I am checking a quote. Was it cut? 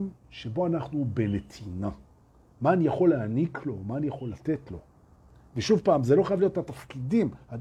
no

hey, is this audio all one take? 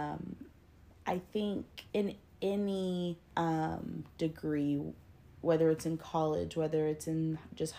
no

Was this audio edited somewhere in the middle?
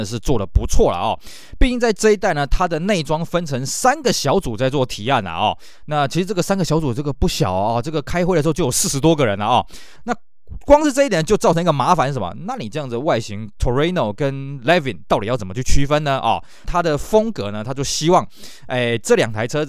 yes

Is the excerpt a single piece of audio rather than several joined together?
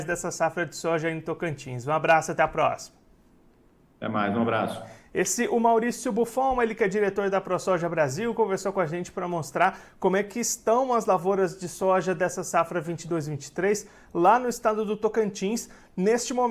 yes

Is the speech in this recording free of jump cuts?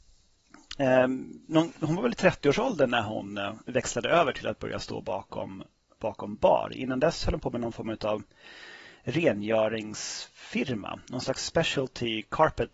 yes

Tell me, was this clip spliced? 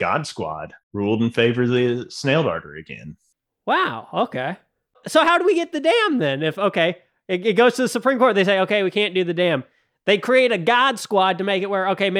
no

